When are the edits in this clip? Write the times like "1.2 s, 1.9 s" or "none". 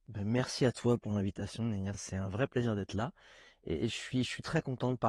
none